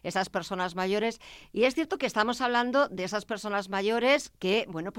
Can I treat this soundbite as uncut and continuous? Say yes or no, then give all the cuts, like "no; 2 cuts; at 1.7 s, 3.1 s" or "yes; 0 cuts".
yes; 0 cuts